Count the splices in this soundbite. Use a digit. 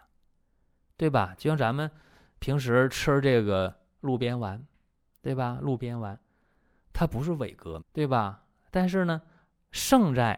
1